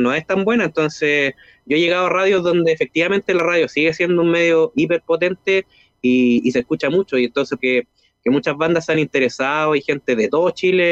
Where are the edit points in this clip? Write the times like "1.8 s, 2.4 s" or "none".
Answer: 7.6 s